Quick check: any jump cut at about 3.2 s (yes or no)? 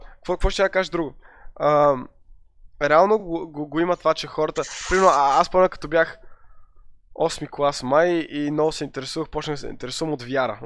no